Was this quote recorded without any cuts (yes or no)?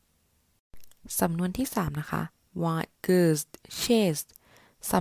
no